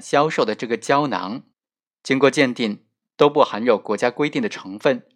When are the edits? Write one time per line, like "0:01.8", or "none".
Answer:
none

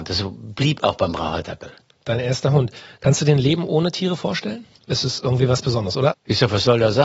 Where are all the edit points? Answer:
0:04.8
0:06.1

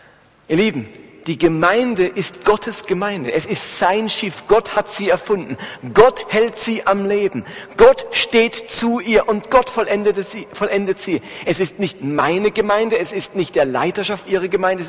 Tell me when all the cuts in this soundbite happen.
none

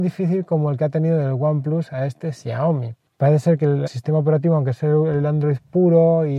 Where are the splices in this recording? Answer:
0:03.9

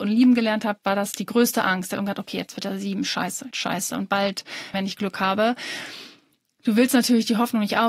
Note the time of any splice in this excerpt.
0:03.5
0:04.7

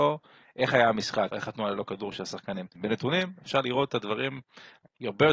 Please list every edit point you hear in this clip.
0:01.3
0:02.8

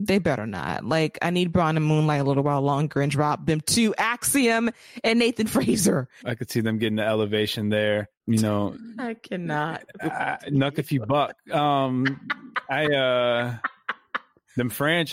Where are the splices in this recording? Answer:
0:06.2
0:08.2

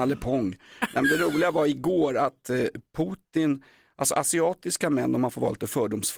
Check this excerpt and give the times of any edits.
none

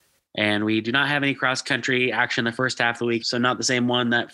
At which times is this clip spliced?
0:03.2

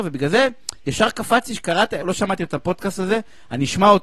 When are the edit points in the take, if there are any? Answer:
0:02.0

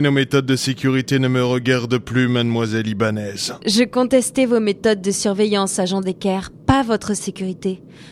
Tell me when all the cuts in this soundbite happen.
none

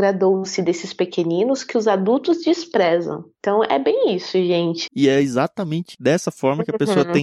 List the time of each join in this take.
0:04.9

